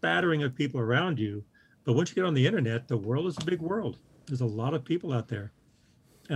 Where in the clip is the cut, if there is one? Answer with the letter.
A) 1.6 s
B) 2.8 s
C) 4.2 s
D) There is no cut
D